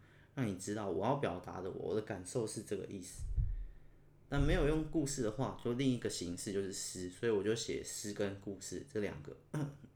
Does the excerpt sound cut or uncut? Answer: uncut